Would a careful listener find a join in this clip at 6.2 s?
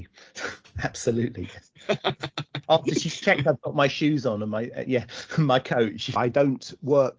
yes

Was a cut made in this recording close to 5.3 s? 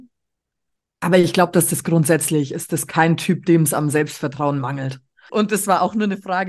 yes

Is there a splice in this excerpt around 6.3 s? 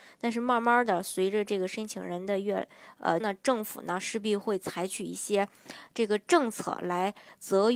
no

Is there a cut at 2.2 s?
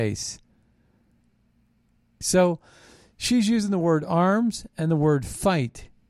yes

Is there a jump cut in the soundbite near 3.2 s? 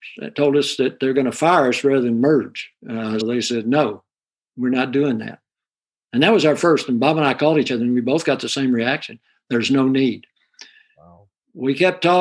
yes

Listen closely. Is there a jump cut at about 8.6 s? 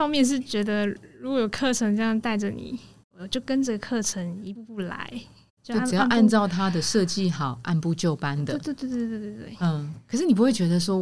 no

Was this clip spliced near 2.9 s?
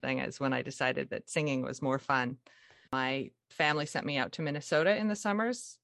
yes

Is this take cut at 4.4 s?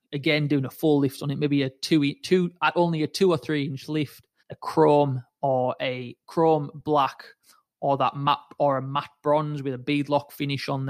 yes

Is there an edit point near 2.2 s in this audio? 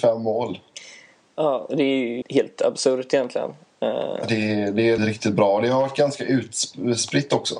yes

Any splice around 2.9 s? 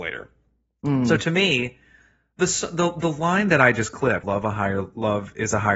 no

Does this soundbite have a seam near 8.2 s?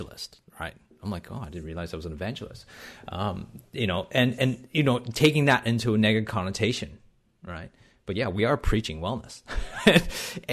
no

